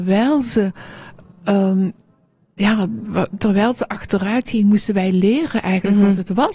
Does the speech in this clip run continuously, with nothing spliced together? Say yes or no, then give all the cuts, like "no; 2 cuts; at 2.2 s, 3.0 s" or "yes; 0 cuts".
yes; 0 cuts